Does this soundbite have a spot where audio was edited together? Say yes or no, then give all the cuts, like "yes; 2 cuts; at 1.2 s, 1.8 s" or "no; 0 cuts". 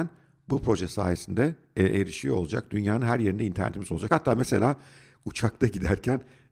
no; 0 cuts